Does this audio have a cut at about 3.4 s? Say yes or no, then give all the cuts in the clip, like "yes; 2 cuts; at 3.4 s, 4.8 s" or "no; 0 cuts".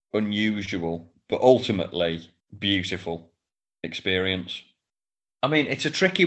no; 1 cut; at 5.3 s